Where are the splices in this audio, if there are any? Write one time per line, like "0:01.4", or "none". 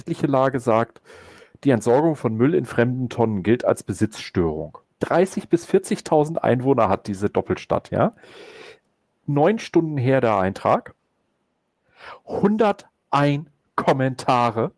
0:04.8